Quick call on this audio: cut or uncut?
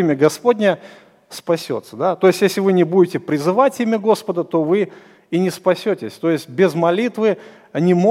uncut